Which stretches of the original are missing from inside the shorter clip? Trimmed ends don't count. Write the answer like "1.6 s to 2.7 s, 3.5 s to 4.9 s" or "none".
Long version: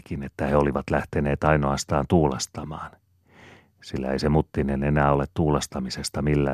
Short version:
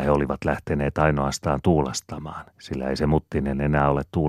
2.9 s to 3.7 s